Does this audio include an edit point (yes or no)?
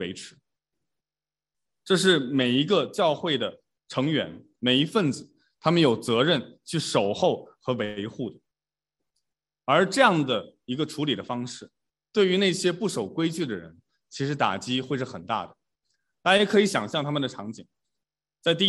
no